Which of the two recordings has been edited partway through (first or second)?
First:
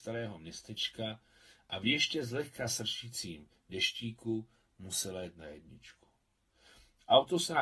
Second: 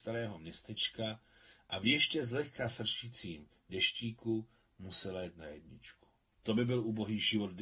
second